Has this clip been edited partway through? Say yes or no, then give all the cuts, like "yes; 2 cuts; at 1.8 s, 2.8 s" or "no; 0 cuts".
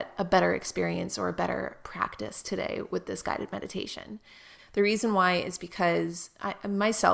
yes; 1 cut; at 4.6 s